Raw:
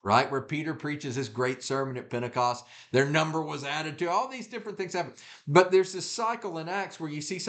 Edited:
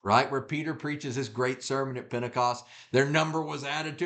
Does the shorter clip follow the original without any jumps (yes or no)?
yes